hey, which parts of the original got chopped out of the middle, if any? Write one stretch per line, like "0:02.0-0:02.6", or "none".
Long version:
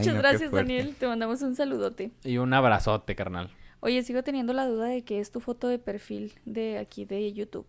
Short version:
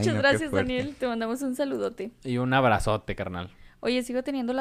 none